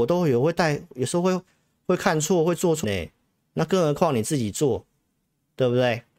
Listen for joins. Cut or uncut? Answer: cut